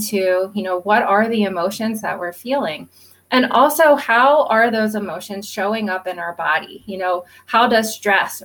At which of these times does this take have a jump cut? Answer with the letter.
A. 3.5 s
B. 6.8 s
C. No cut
C